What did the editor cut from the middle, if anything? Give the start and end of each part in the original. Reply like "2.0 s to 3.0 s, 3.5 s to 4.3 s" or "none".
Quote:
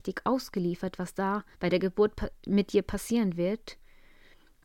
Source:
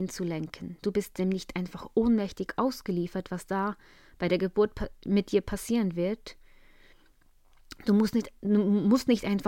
3.8 s to 4.1 s

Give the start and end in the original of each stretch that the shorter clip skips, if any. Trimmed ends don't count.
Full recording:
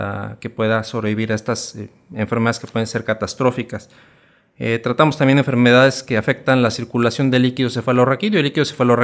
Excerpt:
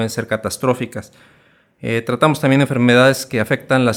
none

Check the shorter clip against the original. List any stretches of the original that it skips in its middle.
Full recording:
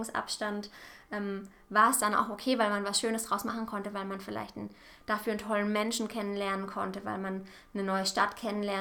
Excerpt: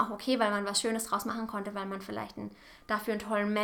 none

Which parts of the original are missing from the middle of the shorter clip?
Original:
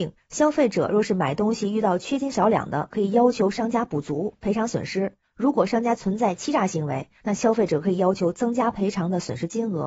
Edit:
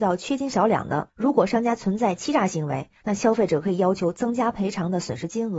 2.9 s to 5.3 s

